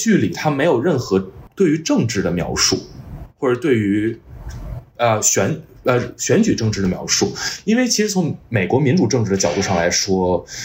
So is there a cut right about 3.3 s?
no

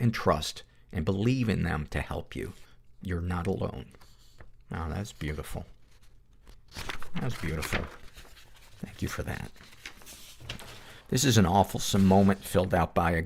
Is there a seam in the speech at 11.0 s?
yes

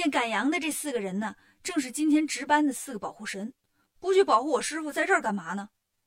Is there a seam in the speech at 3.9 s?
yes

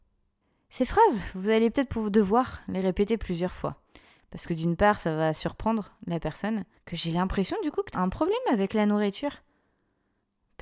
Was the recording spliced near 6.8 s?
yes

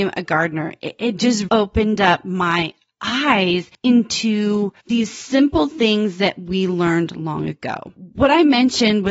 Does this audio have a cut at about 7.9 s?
no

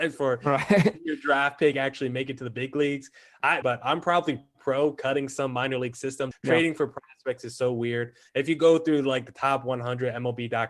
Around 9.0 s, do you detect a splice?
no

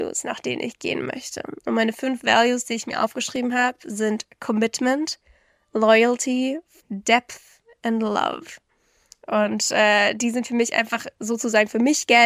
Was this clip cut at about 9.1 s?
no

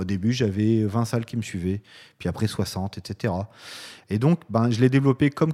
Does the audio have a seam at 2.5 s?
no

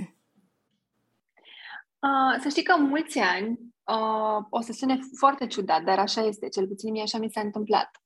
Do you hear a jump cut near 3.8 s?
no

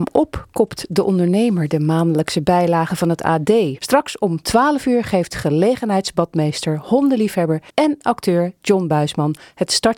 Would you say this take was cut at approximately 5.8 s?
no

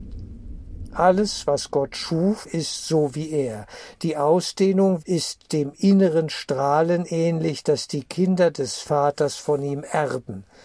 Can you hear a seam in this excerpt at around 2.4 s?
yes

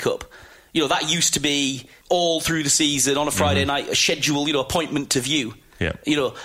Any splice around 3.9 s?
no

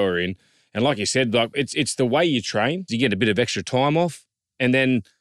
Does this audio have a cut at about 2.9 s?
yes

